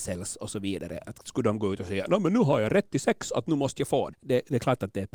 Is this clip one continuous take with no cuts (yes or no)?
no